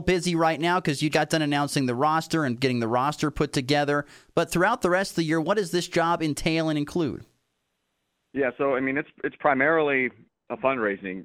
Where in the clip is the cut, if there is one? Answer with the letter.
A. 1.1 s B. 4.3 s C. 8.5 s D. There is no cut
A